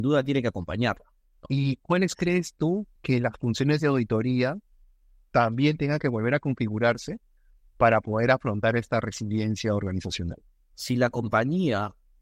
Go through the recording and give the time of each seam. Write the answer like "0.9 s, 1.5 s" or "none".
1.5 s, 3.0 s